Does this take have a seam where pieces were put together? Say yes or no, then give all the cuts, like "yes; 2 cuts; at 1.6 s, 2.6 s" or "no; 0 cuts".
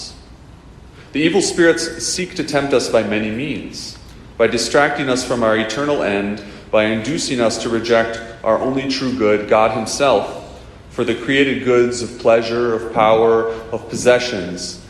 no; 0 cuts